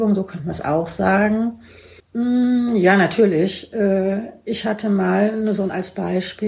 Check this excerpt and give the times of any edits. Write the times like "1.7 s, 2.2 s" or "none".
2.0 s